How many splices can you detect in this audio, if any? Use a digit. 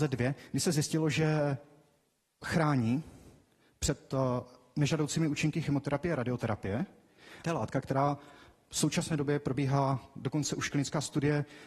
1